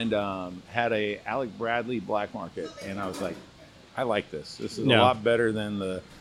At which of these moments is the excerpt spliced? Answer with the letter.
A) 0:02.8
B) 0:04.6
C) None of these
C